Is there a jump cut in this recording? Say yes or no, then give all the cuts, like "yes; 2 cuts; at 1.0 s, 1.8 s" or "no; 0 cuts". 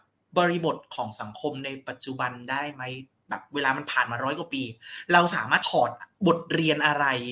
yes; 1 cut; at 5.6 s